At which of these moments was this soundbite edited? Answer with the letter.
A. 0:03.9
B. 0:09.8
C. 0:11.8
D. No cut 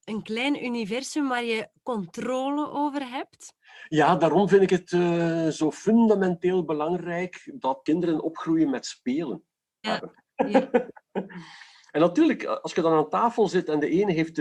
B